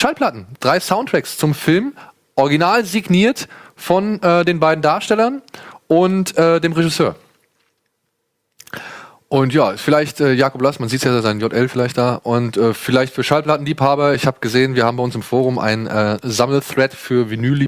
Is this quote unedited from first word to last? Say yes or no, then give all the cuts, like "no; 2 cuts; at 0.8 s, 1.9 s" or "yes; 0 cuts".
yes; 0 cuts